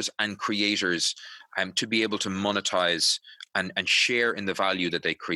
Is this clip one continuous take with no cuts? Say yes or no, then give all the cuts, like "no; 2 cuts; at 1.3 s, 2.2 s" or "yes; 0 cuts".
yes; 0 cuts